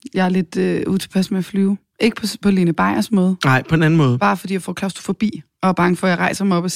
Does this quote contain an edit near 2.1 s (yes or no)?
no